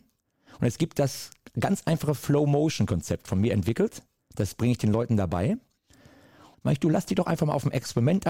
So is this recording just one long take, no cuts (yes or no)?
no